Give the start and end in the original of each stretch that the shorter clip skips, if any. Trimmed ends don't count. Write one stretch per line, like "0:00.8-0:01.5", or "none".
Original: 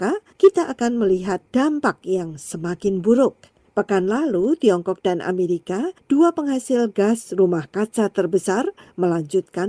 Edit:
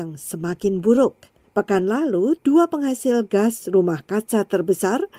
0:04.6-0:06.0